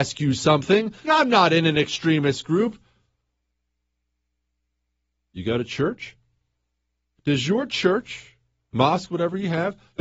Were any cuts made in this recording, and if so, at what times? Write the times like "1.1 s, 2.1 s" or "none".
1.0 s, 7.2 s, 8.7 s